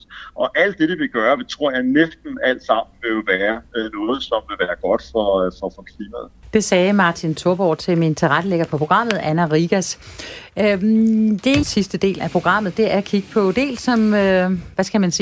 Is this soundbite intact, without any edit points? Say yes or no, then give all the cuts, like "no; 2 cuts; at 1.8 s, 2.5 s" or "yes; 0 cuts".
no; 1 cut; at 11.6 s